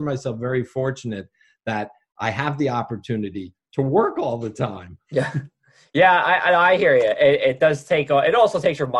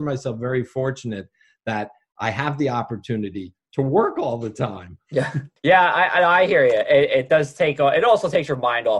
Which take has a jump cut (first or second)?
second